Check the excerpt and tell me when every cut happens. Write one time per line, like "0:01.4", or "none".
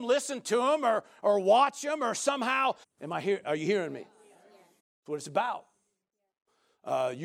0:02.8
0:04.8